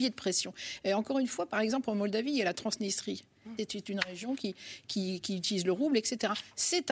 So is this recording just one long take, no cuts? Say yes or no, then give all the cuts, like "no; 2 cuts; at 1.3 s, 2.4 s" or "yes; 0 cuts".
no; 2 cuts; at 3.6 s, 5.2 s